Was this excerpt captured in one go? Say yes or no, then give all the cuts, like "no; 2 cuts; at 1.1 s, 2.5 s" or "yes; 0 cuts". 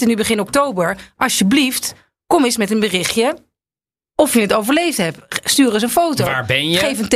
yes; 0 cuts